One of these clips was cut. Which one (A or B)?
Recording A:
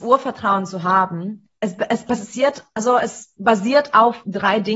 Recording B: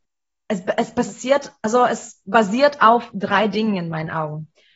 A